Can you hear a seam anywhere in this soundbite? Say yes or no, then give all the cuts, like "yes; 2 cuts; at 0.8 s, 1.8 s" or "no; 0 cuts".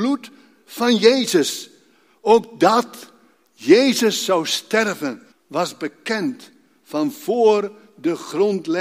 yes; 1 cut; at 5.3 s